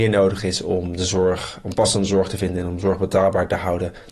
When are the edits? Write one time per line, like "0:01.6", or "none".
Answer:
none